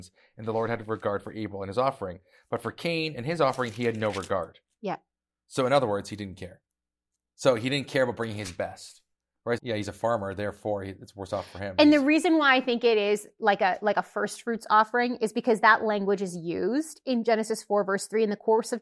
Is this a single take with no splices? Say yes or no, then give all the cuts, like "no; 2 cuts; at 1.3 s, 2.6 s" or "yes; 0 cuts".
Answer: no; 1 cut; at 9.6 s